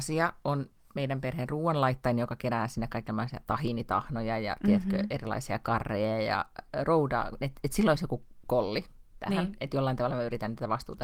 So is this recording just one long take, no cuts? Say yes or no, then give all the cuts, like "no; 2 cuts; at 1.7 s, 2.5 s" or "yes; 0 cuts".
yes; 0 cuts